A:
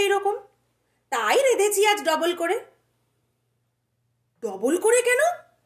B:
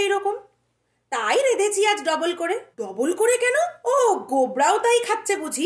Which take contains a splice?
B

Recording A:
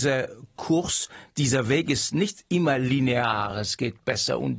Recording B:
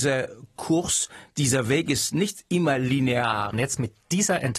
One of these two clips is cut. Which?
B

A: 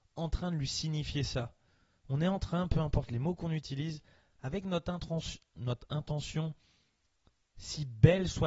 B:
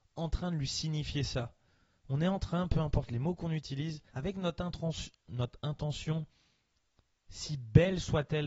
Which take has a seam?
B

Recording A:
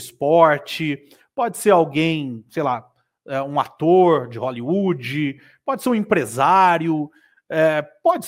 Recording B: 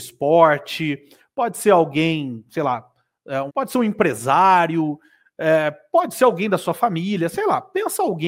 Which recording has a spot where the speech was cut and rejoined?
B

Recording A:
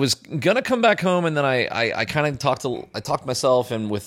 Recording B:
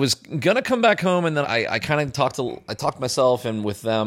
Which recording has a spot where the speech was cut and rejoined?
B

